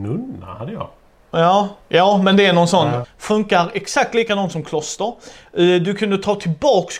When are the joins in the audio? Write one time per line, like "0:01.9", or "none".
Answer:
0:01.8
0:03.0